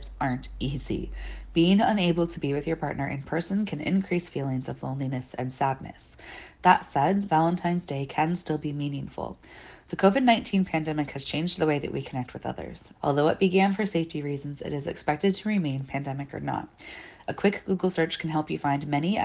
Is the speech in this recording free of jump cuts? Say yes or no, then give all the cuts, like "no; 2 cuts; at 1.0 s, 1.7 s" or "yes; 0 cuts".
no; 1 cut; at 12.9 s